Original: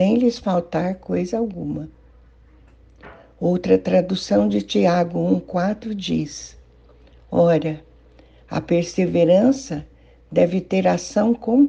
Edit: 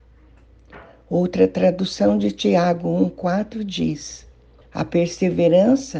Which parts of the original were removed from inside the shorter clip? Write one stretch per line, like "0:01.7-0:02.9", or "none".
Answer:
0:06.9-0:08.4